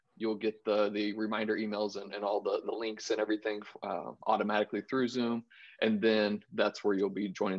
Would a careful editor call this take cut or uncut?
uncut